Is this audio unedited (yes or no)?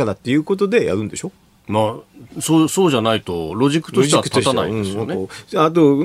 yes